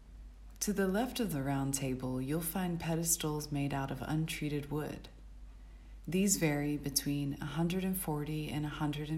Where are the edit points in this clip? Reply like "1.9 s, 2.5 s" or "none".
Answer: none